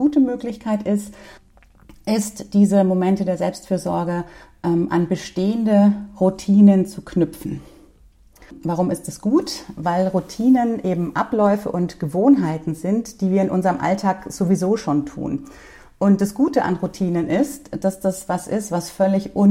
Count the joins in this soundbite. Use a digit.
0